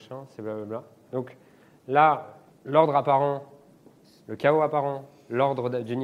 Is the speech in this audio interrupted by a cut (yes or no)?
yes